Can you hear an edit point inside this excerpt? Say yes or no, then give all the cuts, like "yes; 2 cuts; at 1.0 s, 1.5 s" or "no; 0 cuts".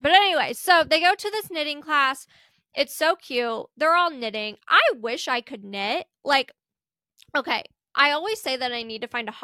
no; 0 cuts